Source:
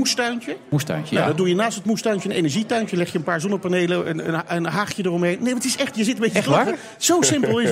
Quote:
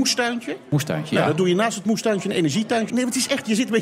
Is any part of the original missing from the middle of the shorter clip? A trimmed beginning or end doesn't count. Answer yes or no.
yes